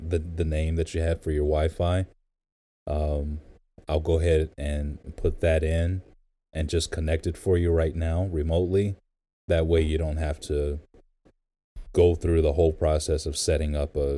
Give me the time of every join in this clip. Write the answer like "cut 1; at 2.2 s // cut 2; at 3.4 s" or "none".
none